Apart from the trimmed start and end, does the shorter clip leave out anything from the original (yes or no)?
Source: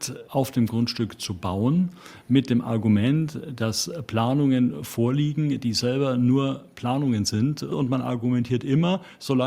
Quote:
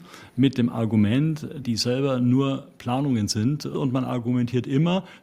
yes